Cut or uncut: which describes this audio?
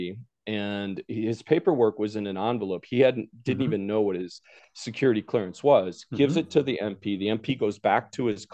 uncut